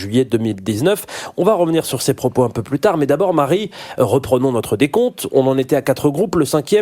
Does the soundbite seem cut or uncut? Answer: uncut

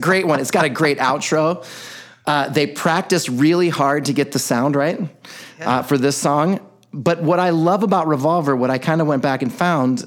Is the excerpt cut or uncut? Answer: uncut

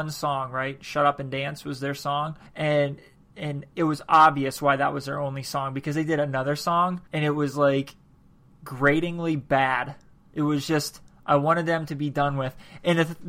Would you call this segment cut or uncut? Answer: cut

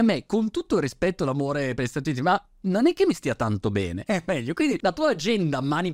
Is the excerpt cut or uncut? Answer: cut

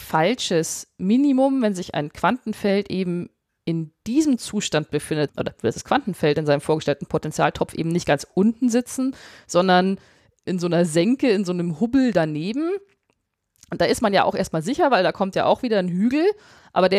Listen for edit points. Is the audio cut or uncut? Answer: cut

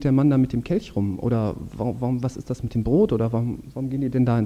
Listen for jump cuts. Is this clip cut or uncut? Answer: uncut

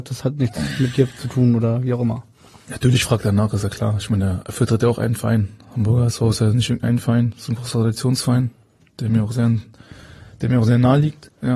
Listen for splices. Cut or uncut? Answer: uncut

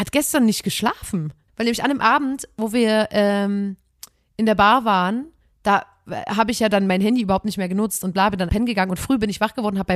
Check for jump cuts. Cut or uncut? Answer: cut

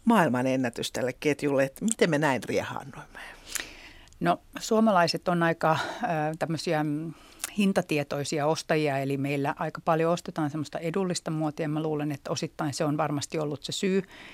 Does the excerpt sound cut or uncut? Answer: uncut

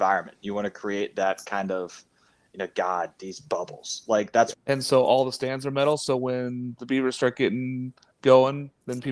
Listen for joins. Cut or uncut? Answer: cut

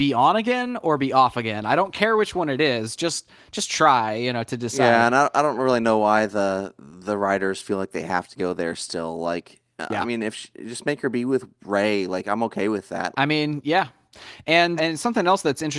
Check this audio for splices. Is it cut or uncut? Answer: cut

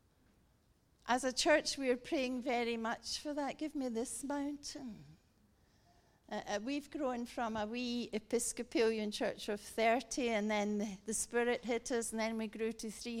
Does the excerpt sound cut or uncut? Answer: uncut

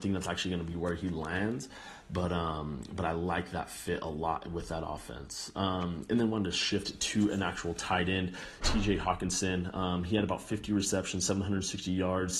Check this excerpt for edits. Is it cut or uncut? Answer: cut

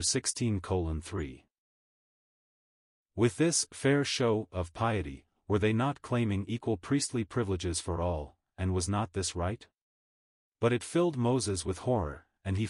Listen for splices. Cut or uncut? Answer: uncut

